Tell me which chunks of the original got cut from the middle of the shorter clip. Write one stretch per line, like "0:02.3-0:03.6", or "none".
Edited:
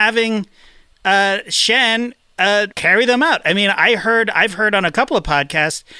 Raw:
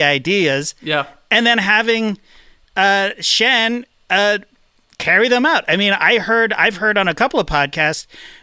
0:04.4-0:05.0